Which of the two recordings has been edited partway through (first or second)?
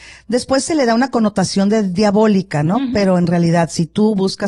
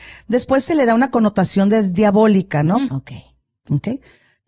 second